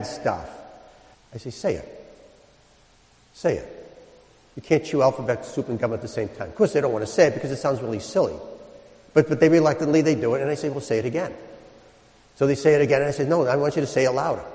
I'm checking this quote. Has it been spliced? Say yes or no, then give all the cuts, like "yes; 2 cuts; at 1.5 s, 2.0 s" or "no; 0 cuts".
yes; 1 cut; at 1.1 s